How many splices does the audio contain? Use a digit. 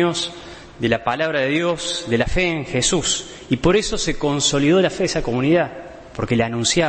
0